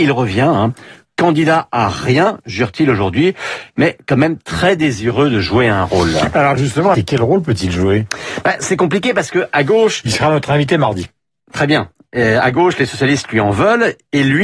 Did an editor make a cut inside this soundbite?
yes; 1 cut; at 6.9 s

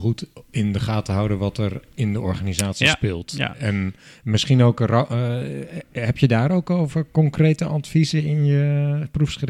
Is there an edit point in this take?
no; 0 cuts

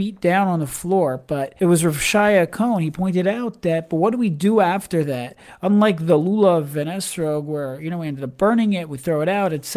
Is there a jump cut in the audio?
no; 0 cuts

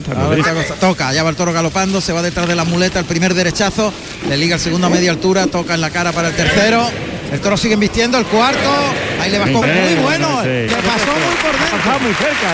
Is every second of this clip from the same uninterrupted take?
no; 2 cuts; at 9.6 s, 10.7 s

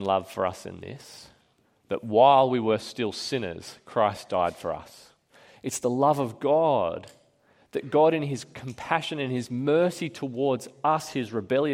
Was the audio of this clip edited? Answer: no; 0 cuts

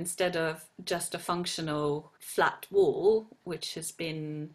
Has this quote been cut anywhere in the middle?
yes; 2 cuts; at 2.2 s, 3.4 s

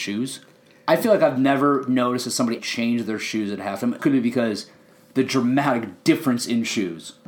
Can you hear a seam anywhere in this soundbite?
yes; 2 cuts; at 2.6 s, 4.0 s

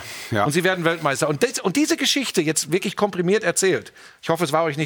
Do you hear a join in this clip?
no; 0 cuts

